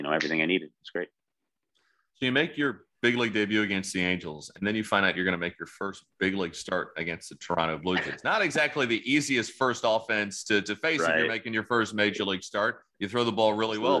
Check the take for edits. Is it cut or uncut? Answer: uncut